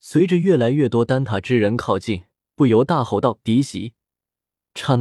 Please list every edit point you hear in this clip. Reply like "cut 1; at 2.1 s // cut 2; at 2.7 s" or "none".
cut 1; at 2.5 s